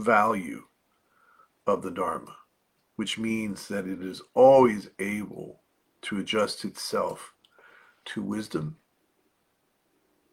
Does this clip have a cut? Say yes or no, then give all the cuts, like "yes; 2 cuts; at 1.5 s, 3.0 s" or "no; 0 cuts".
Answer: no; 0 cuts